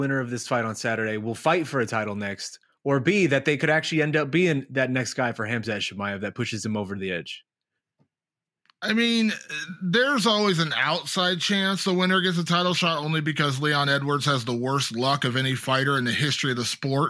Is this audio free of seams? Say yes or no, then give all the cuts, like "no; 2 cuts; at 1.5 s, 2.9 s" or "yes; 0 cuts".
yes; 0 cuts